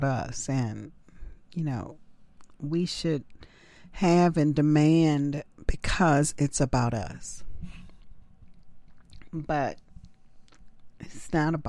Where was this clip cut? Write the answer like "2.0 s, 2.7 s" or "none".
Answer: none

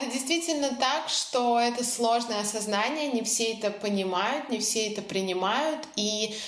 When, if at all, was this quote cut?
none

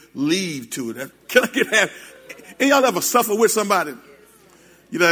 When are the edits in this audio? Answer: 1.1 s

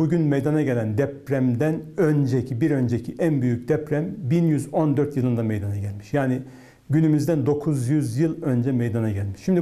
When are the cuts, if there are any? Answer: none

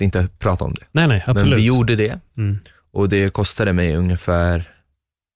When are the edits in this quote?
none

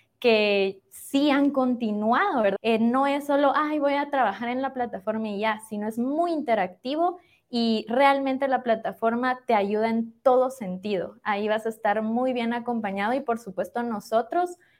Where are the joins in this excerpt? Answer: 2.6 s

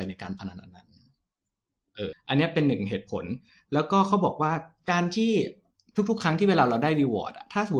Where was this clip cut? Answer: 2.1 s

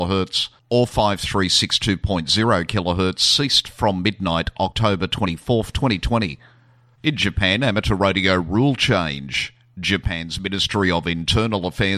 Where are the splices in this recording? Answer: 6.9 s

